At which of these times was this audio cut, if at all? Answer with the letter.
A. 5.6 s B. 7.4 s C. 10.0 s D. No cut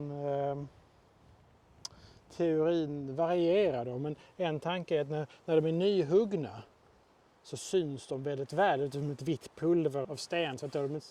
C